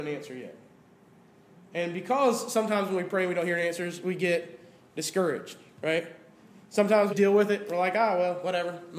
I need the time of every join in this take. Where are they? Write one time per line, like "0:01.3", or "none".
0:07.1